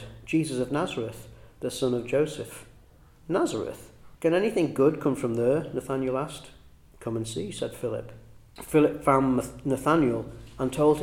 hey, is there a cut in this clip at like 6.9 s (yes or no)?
no